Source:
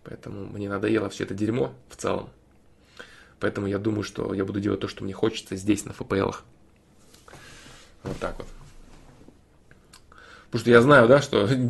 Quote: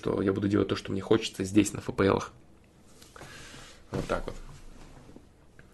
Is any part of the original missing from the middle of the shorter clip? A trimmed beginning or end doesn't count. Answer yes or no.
no